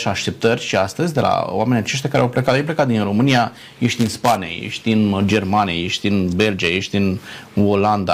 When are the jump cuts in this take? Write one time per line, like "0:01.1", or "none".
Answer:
none

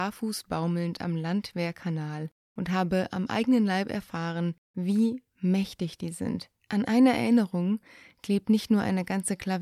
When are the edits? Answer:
0:06.6

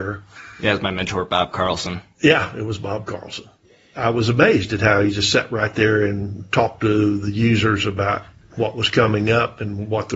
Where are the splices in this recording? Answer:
none

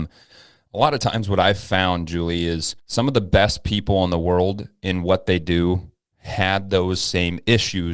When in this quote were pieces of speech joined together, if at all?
0:02.8

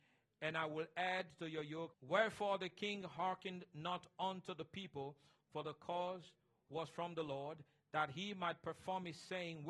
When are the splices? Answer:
0:01.9

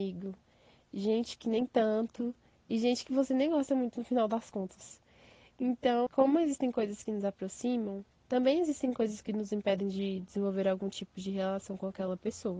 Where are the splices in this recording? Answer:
0:06.1
0:08.2

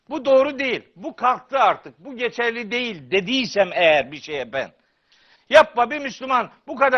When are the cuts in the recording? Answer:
0:05.4

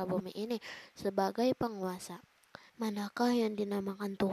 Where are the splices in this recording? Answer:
0:02.7

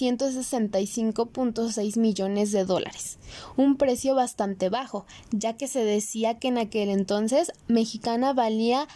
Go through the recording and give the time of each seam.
none

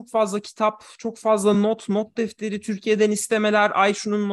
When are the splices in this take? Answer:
none

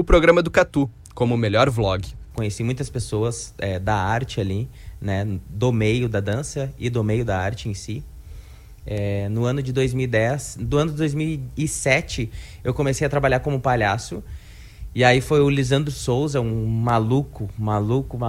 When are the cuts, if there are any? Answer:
0:02.3

